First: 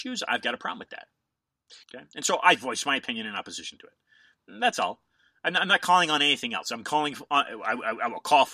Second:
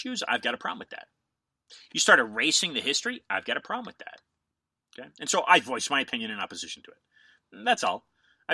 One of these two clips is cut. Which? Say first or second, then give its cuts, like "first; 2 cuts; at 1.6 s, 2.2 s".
first; 1 cut; at 1.8 s